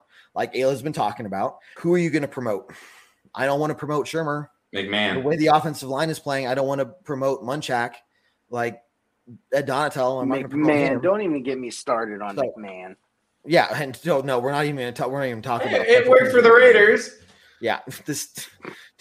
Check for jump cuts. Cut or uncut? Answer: cut